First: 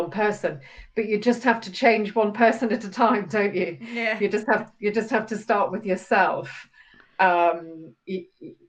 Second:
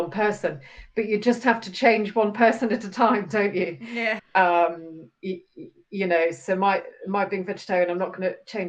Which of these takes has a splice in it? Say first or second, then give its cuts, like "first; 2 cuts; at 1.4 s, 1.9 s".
second; 1 cut; at 4.2 s